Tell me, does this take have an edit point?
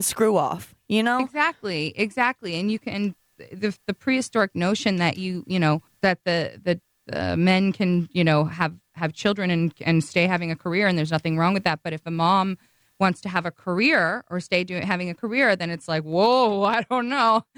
no; 0 cuts

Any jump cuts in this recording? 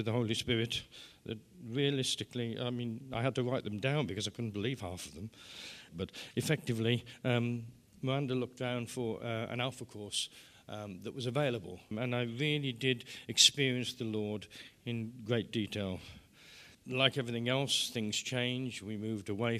yes; 3 cuts; at 5.9 s, 11.9 s, 16.7 s

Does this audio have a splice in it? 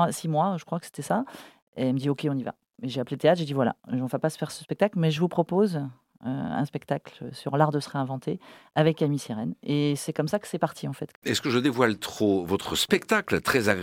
yes; 1 cut; at 11.1 s

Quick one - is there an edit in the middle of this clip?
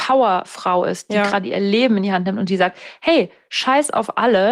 no; 0 cuts

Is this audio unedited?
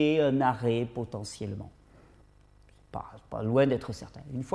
yes; 0 cuts

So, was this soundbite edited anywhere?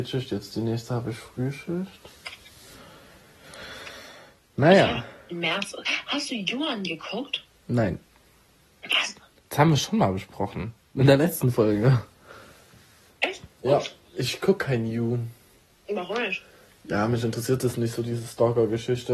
no; 0 cuts

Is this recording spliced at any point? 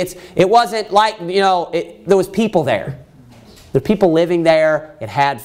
no; 0 cuts

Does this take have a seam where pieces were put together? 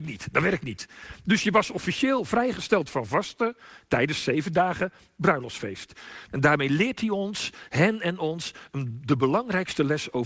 yes; 1 cut; at 6.3 s

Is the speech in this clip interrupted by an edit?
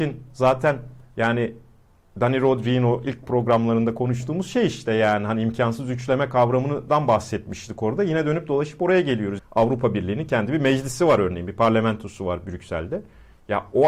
yes; 1 cut; at 9.4 s

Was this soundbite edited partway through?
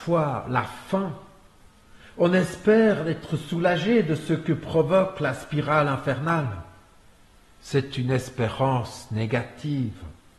no; 0 cuts

